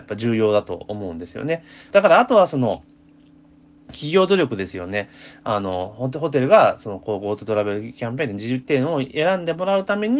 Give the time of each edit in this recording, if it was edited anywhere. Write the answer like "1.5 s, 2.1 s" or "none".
1.9 s